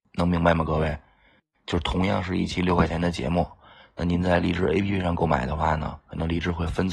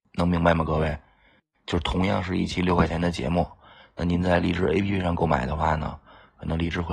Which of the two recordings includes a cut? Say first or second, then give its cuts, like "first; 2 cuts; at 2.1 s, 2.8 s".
first; 1 cut; at 6.0 s